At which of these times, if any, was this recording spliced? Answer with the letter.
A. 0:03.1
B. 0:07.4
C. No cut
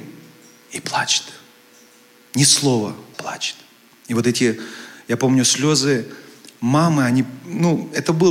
A